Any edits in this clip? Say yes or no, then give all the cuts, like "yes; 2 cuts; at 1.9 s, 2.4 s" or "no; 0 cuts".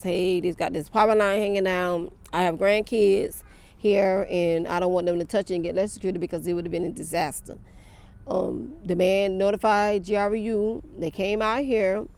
yes; 1 cut; at 8.8 s